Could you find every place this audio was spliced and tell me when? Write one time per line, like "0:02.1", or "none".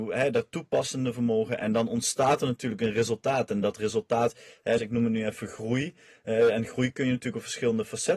0:04.8